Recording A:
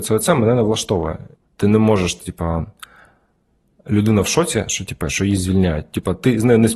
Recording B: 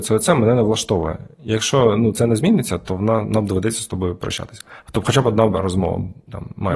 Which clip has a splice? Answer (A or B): A